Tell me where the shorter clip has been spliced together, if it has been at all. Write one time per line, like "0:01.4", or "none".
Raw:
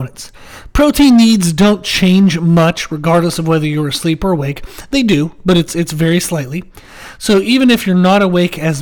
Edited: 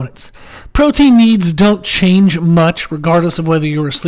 none